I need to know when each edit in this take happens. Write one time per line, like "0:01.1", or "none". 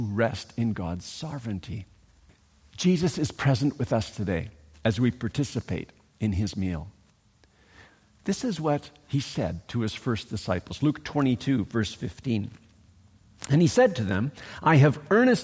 none